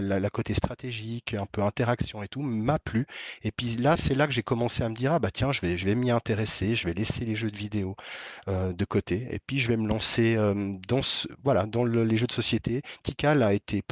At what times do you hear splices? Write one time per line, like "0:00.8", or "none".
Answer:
0:04.0